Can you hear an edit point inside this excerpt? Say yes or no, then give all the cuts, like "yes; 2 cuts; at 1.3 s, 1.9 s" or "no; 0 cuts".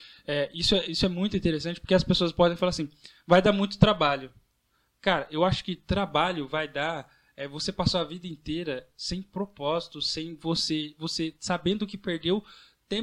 no; 0 cuts